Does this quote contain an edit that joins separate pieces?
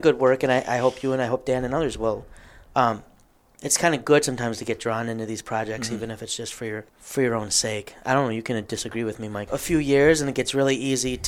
yes; 2 cuts; at 6.9 s, 9.5 s

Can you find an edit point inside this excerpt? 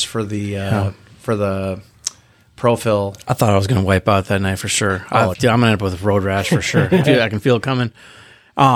yes; 2 cuts; at 5.3 s, 7.0 s

